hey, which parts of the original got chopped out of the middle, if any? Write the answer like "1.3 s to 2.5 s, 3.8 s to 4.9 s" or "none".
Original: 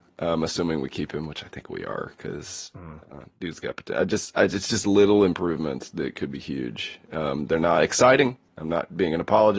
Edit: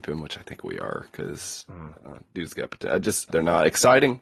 4.4 s to 7.5 s

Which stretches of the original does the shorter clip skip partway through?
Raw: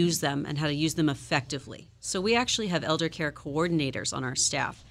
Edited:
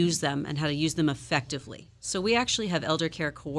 none

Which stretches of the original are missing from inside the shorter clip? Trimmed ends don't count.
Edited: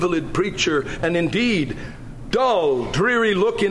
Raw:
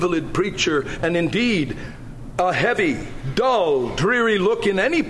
2.3 s to 3.3 s

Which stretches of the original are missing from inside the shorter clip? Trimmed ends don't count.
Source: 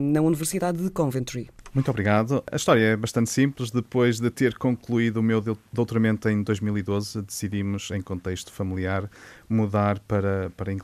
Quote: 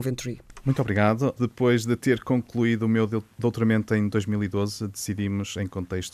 2.5 s to 3.7 s

